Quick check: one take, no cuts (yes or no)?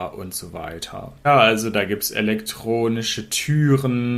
no